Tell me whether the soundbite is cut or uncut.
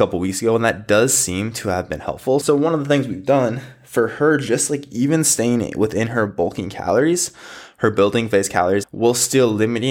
cut